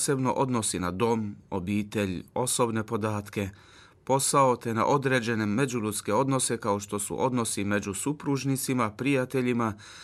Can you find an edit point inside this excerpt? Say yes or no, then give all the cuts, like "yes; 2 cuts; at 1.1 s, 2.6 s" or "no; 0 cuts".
no; 0 cuts